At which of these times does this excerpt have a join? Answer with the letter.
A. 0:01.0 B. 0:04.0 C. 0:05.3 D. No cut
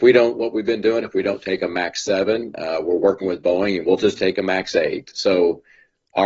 D